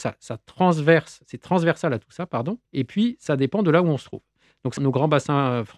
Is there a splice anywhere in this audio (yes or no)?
yes